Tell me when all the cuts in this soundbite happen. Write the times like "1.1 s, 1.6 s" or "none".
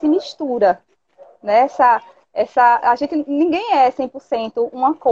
none